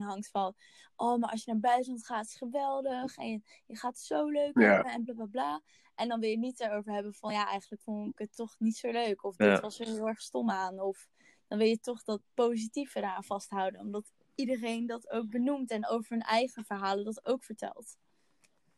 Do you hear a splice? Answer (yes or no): yes